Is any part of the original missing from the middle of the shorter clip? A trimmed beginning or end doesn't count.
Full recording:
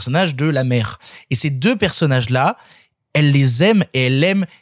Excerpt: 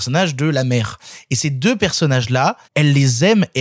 yes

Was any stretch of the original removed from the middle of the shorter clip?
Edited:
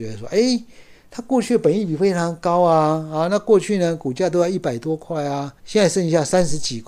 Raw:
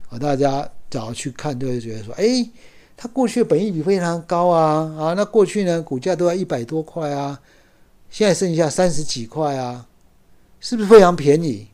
yes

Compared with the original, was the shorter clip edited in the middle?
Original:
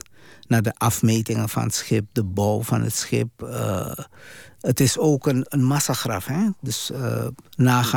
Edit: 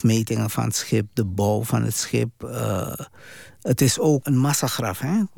yes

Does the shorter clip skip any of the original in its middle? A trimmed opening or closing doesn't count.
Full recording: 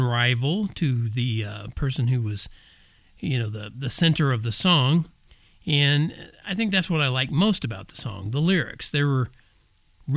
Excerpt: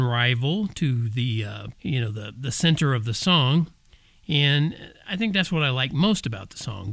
yes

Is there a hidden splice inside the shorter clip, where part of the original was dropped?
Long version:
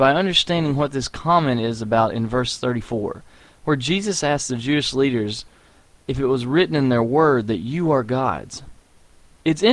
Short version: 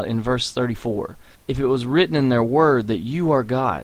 yes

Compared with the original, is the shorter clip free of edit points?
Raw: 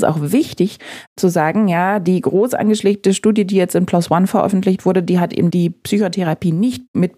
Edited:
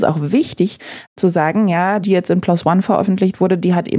no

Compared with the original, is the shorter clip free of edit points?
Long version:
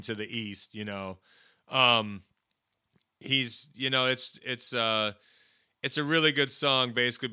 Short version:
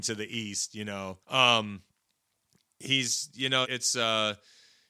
no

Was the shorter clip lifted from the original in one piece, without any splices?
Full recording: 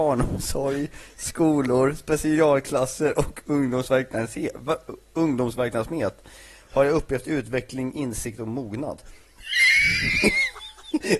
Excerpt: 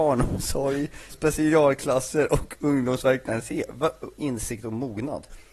no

